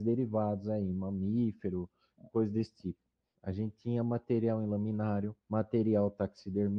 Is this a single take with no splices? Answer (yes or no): no